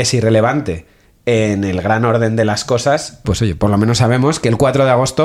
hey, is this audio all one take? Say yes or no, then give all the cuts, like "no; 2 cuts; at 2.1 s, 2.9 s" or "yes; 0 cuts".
no; 1 cut; at 3.2 s